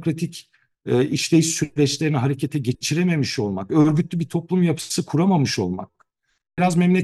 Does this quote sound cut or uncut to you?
uncut